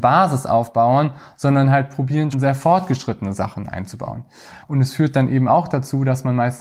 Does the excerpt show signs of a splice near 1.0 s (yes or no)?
no